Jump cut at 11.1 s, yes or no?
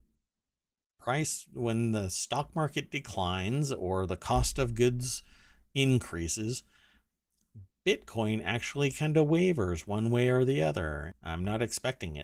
yes